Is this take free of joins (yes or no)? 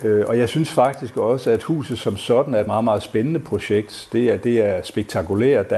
yes